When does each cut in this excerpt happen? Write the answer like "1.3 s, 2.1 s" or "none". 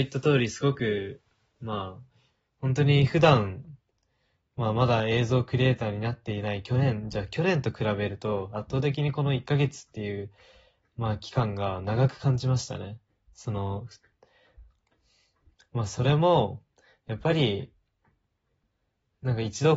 none